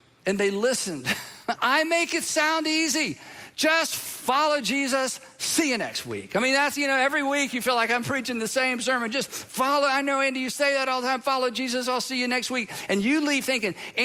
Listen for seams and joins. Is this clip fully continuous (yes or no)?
no